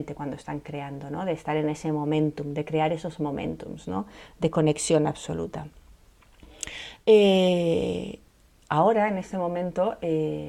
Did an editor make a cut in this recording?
no; 0 cuts

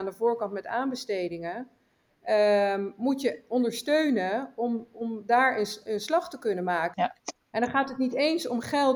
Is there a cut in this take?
yes; 1 cut; at 6.9 s

